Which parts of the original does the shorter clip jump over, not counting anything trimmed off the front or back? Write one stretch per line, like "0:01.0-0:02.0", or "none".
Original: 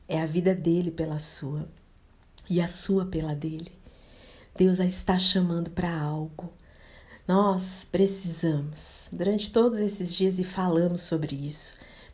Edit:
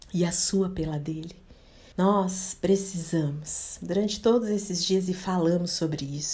0:04.3-0:07.2